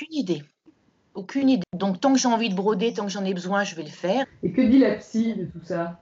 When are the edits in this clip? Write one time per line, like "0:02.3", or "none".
0:01.6
0:04.2